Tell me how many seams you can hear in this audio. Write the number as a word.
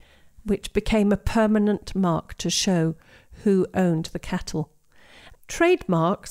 one